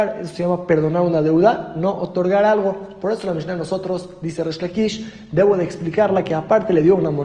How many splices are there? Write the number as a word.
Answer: zero